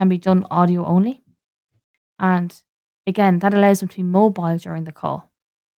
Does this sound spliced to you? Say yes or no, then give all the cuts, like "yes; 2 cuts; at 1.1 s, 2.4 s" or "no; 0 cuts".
yes; 1 cut; at 2.1 s